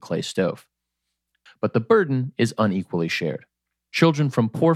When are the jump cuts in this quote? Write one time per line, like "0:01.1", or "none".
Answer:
0:01.5

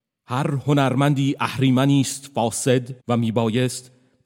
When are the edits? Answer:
0:03.0

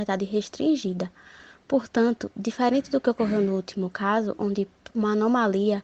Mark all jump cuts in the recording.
0:04.9

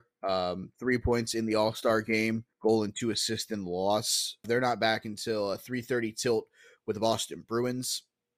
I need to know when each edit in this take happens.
0:02.5
0:04.4

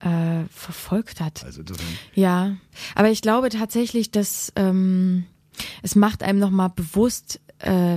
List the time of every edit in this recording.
0:01.4

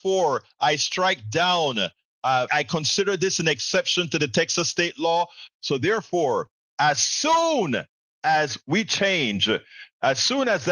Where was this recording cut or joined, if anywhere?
0:02.5
0:05.5

